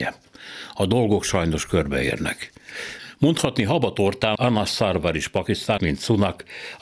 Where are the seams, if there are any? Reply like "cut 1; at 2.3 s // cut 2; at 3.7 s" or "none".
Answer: cut 1; at 4.4 s // cut 2; at 5.8 s

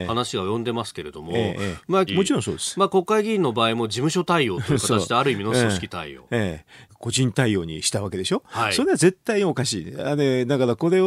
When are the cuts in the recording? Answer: cut 1; at 2.1 s // cut 2; at 6.9 s

